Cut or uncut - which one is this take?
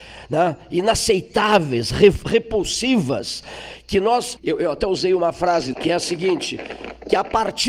cut